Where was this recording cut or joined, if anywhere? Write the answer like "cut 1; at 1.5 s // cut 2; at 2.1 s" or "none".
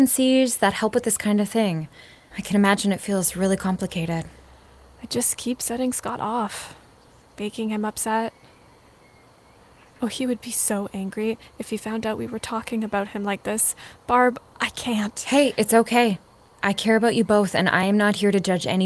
cut 1; at 2.3 s